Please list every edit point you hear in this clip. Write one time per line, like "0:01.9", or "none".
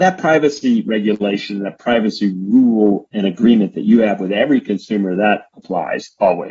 none